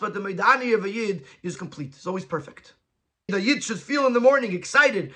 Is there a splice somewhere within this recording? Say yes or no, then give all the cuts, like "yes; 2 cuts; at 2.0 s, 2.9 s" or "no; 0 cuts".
yes; 2 cuts; at 1.6 s, 3.3 s